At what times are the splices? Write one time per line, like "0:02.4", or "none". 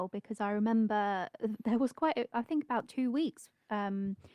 0:02.3